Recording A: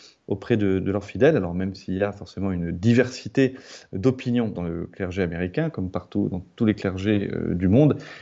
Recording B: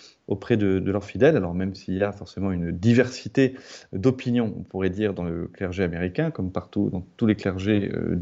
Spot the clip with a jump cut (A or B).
A